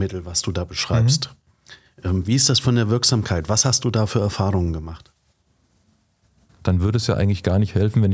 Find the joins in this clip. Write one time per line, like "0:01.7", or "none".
0:06.6